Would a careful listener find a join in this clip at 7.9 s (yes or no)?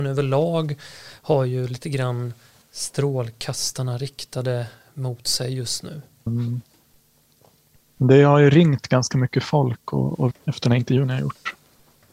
no